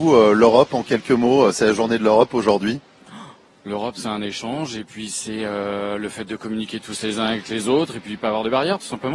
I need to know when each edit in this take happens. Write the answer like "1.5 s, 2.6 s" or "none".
none